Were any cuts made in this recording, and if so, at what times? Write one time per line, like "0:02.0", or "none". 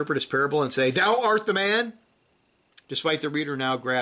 0:02.8